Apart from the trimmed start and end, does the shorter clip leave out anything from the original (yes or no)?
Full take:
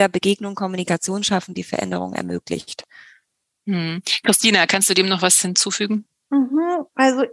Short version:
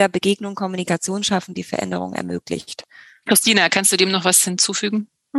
yes